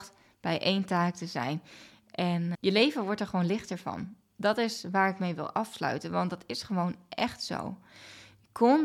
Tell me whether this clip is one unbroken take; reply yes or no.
no